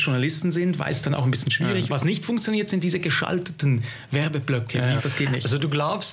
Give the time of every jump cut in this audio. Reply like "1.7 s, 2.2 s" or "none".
1.9 s, 5.0 s